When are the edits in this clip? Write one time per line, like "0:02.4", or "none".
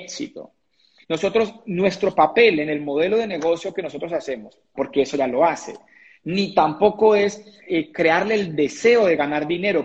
0:01.0
0:04.7
0:07.7